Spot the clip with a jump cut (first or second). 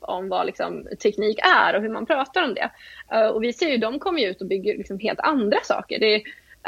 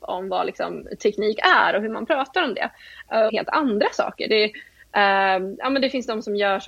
second